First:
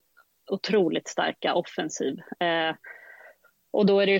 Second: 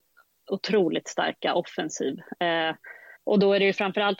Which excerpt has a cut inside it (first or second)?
second